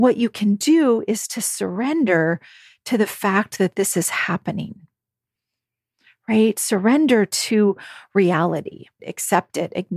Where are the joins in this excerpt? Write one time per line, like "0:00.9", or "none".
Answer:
0:09.0